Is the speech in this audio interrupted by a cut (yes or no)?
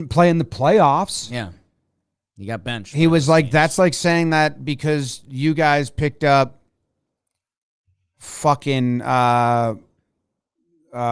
no